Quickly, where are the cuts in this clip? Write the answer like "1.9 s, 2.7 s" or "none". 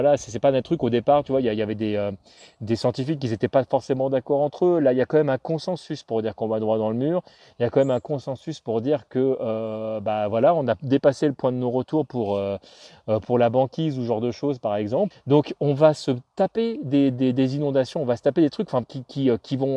15.1 s, 18.8 s